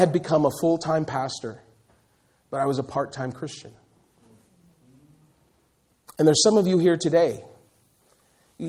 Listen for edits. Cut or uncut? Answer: uncut